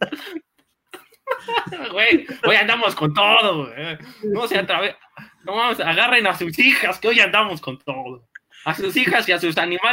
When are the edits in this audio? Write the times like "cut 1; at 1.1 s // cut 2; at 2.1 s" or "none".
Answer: none